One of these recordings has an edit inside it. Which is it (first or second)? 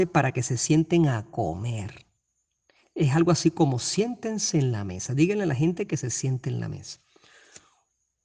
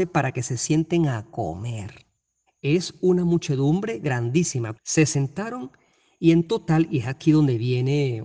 second